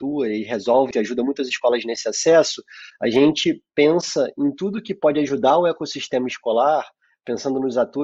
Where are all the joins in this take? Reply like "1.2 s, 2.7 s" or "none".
0.9 s